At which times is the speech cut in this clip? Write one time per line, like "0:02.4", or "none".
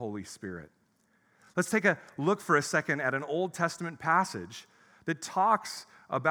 none